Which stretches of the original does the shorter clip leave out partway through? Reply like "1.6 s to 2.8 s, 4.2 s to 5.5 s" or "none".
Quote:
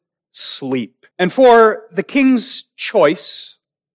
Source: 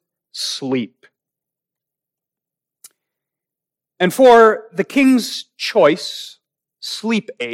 1.1 s to 3.9 s